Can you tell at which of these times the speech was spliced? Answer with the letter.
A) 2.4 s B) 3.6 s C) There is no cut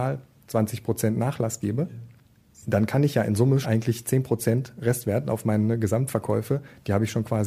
B